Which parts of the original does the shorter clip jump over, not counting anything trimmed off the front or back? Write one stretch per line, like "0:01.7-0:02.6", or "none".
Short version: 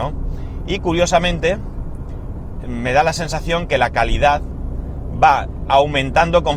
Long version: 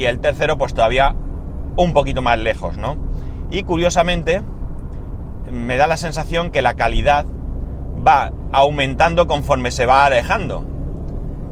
none